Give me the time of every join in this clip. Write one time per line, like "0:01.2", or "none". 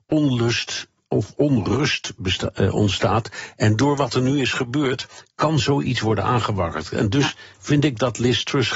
none